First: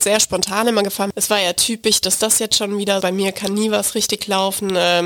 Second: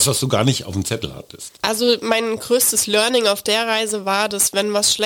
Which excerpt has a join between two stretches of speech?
first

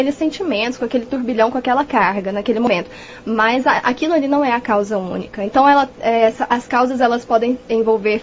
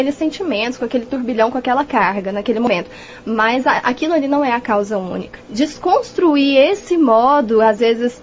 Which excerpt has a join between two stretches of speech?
second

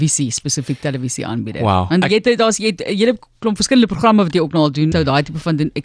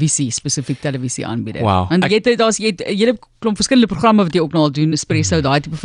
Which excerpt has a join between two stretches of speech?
first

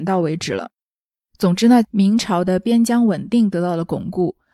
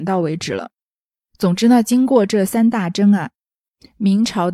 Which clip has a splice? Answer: first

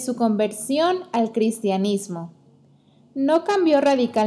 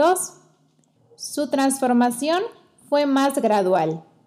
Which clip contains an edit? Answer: second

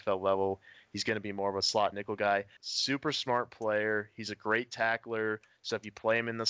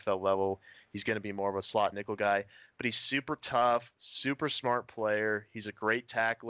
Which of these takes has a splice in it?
first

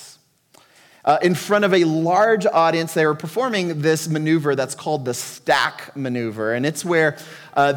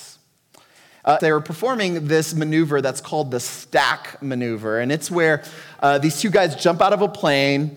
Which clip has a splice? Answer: second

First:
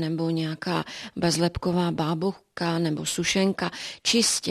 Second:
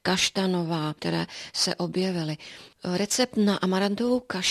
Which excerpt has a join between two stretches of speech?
second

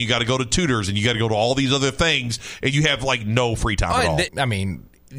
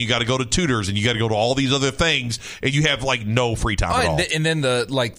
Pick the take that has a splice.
first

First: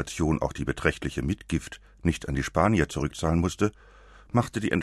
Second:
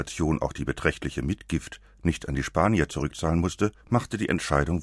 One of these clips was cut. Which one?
second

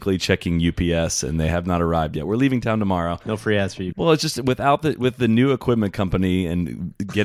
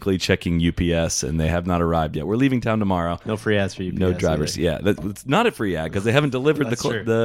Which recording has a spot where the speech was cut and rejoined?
first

